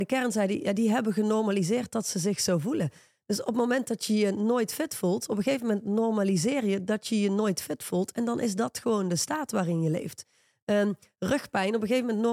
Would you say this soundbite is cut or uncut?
uncut